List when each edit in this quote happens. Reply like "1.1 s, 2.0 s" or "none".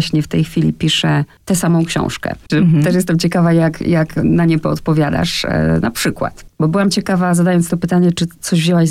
2.5 s